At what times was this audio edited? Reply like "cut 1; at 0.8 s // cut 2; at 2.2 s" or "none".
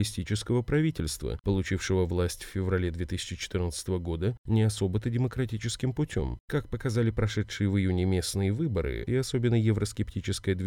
cut 1; at 6.5 s // cut 2; at 9.1 s